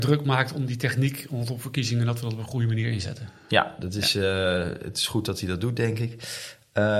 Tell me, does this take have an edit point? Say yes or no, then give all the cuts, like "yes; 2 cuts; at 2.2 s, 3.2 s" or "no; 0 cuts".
no; 0 cuts